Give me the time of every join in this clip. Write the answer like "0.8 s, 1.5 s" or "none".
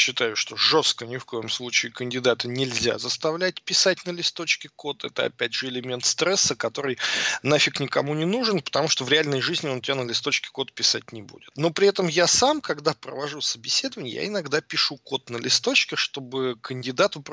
none